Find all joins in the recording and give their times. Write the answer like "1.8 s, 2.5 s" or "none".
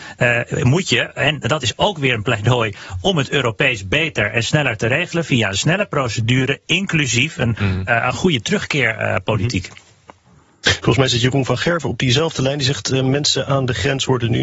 8.1 s